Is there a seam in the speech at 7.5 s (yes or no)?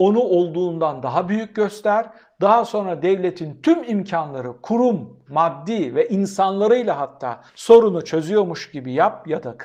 yes